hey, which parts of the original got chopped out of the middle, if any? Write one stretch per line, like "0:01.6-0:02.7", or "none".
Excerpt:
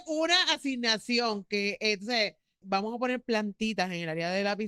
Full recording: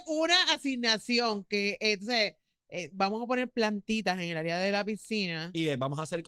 0:02.6-0:02.9